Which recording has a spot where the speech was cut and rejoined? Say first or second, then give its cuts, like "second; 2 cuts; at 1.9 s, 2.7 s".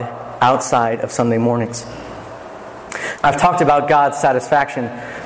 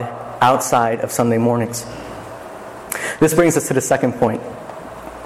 first; 1 cut; at 3.2 s